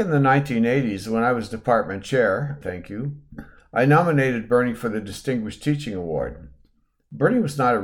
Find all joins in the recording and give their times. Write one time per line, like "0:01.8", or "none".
0:02.6